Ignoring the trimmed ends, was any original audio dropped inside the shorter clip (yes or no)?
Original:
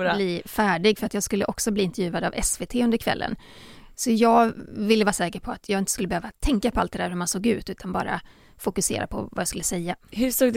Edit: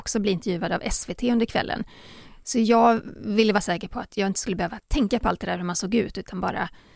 no